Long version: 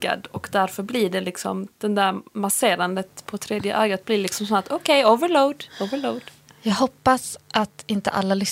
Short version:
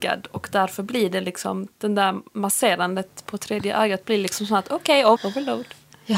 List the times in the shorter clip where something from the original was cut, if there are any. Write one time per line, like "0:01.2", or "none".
0:05.2